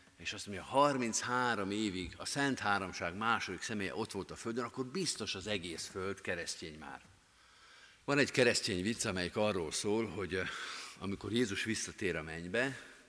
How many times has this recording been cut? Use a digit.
1